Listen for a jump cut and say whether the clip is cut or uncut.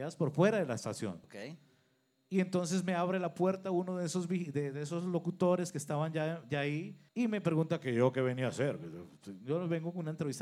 cut